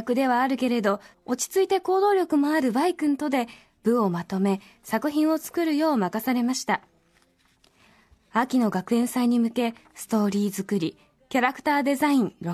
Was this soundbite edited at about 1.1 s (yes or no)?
yes